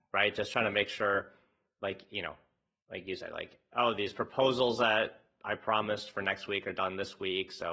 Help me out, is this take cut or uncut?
uncut